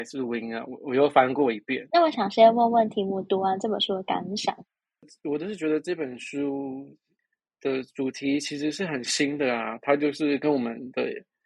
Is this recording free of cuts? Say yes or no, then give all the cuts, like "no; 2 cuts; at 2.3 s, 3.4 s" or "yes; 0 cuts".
no; 1 cut; at 1.9 s